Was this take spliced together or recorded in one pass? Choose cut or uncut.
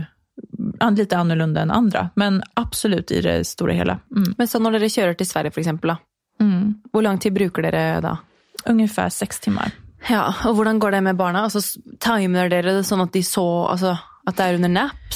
uncut